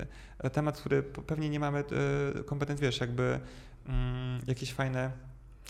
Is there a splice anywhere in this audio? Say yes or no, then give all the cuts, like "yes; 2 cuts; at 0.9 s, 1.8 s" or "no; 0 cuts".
yes; 1 cut; at 2.8 s